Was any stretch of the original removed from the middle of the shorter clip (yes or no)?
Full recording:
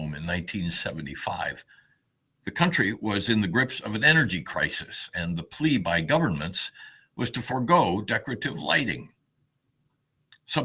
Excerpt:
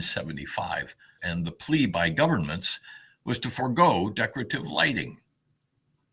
yes